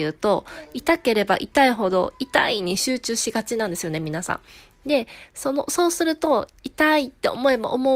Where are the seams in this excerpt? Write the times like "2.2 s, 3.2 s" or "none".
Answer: none